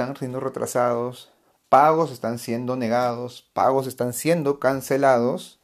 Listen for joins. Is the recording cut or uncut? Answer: uncut